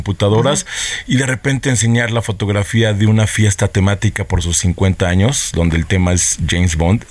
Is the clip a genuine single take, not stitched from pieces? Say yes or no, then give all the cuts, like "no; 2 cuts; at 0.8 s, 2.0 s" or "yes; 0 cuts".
yes; 0 cuts